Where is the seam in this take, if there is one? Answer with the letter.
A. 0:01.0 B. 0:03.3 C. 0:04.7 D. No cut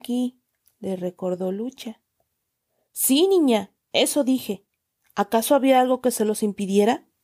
D